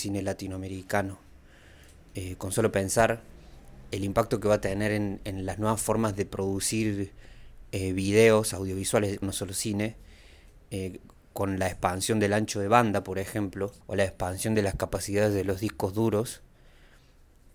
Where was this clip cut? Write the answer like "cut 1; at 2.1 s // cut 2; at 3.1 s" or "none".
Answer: cut 1; at 9.2 s // cut 2; at 13.8 s